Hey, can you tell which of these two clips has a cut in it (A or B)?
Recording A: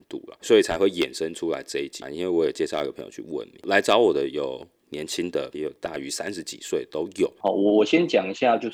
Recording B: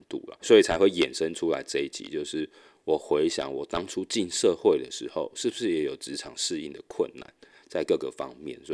A